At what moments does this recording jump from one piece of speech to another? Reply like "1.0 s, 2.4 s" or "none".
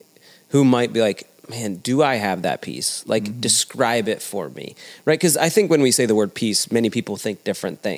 1.4 s